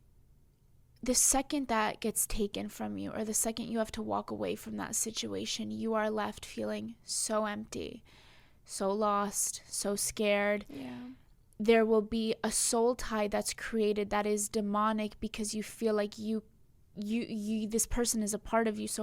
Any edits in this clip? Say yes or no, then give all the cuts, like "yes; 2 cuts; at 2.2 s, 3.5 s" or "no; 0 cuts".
no; 0 cuts